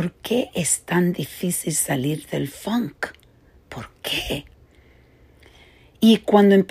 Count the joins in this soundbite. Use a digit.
0